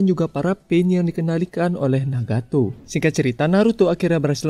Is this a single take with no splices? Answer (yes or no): no